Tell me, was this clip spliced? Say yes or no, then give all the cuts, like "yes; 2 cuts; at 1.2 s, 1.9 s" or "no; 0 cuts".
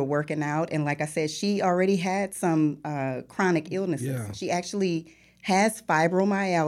no; 0 cuts